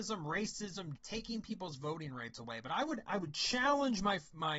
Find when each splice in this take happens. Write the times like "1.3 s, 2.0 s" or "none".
1.0 s